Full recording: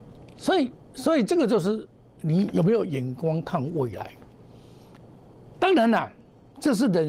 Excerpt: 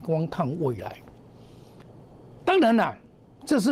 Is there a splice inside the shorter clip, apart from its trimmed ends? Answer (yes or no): no